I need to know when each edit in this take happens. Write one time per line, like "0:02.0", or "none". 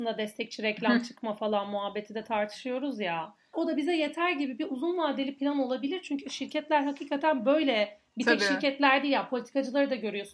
0:03.5